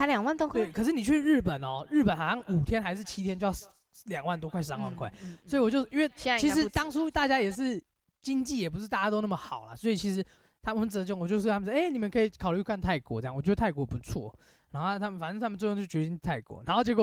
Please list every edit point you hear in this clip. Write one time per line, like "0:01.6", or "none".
none